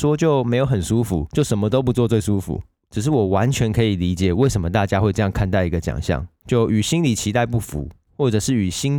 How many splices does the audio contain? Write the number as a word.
one